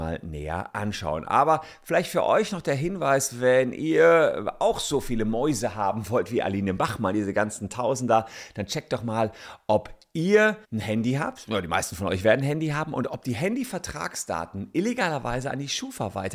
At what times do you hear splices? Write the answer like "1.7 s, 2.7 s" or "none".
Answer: 10.6 s